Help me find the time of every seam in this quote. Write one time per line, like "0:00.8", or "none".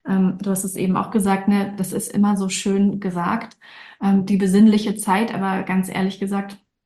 none

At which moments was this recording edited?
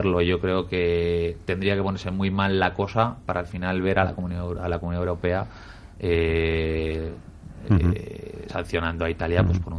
none

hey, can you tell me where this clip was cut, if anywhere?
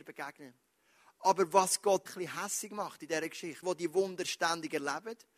0:02.1
0:03.6

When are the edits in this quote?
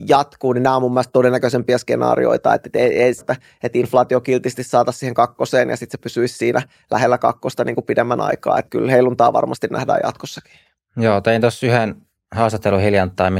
0:03.2

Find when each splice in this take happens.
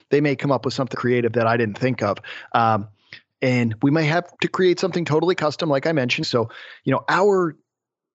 0:00.9
0:04.3
0:06.2

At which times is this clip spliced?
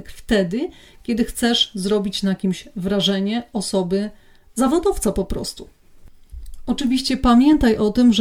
none

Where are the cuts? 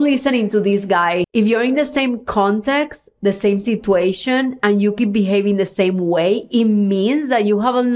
0:01.2

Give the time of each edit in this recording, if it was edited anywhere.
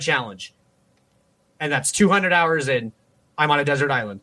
none

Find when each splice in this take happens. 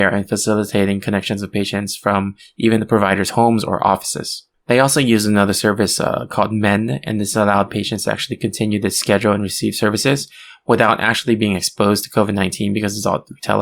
none

